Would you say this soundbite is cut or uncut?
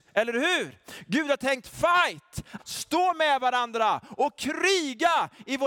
cut